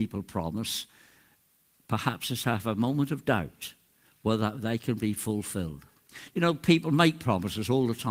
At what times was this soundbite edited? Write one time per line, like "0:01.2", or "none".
none